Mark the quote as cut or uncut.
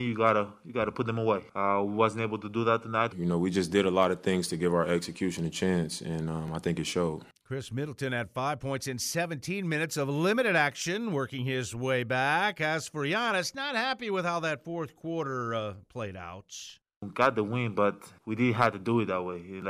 cut